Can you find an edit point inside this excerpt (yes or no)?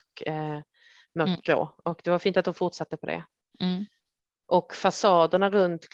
no